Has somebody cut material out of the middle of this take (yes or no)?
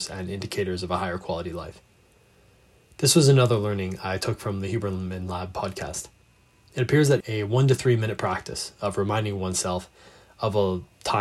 yes